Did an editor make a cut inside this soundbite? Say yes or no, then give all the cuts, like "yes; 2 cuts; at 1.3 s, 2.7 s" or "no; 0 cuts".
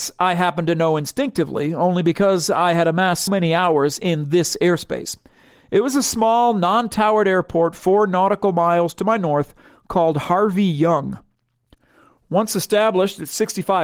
yes; 1 cut; at 3.3 s